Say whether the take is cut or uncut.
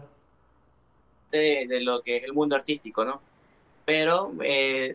uncut